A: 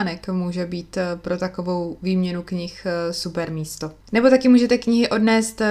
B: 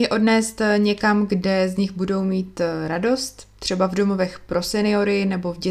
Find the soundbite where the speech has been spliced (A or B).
A